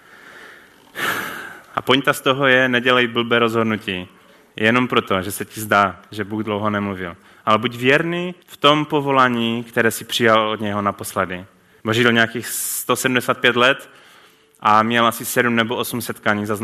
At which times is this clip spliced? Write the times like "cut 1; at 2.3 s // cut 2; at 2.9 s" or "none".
cut 1; at 8.4 s // cut 2; at 11.8 s